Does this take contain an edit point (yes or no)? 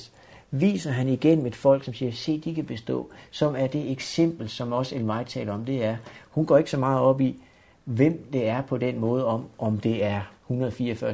no